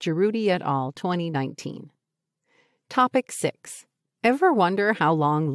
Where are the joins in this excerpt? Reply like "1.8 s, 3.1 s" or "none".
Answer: none